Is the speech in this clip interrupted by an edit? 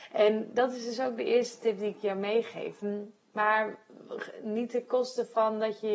yes; 1 cut; at 2.8 s

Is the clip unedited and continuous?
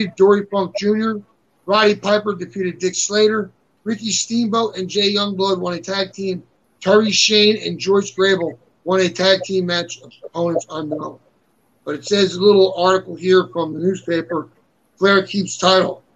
no; 1 cut; at 6.6 s

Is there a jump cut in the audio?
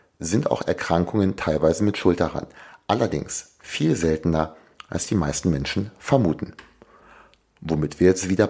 no; 0 cuts

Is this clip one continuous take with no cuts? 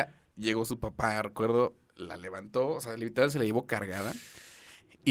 yes; 0 cuts

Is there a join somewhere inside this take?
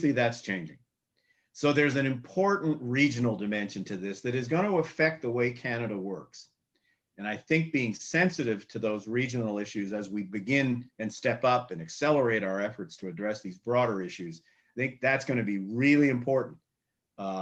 no; 0 cuts

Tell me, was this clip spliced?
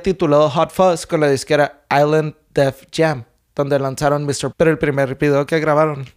yes; 1 cut; at 4.5 s

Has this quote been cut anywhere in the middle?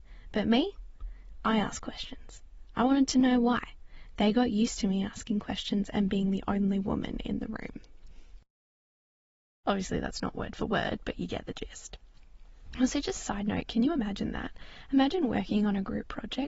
yes; 1 cut; at 9.6 s

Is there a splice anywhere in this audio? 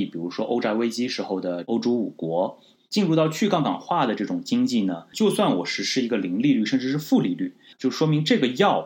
yes; 3 cuts; at 2.8 s, 5.1 s, 7.7 s

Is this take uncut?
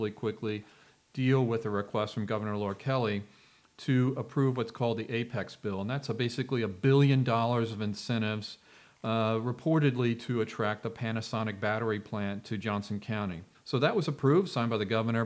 no; 1 cut; at 13.5 s

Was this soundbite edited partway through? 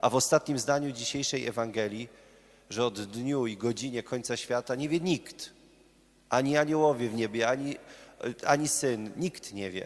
no; 0 cuts

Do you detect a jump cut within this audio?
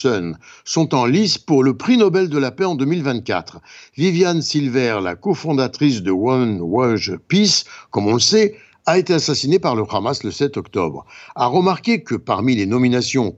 no; 0 cuts

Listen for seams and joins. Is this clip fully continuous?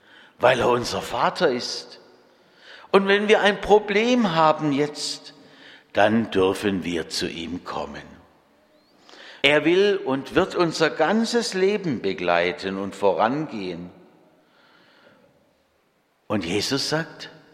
no; 1 cut; at 9.4 s

